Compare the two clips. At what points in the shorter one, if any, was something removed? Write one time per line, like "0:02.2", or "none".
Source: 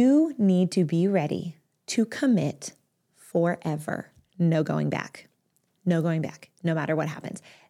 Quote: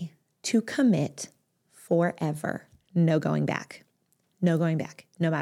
none